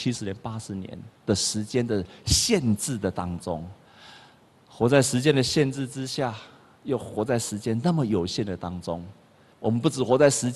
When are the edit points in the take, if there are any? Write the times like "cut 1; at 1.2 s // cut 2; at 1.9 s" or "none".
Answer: cut 1; at 9.5 s